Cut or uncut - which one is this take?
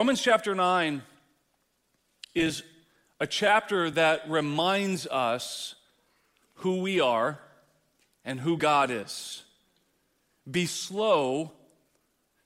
cut